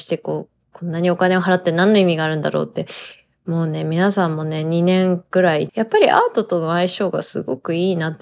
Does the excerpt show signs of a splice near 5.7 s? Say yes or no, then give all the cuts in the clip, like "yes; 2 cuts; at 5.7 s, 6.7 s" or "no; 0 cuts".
yes; 1 cut; at 5.7 s